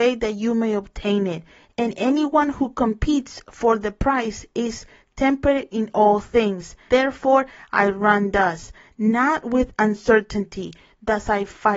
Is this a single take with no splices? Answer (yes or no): no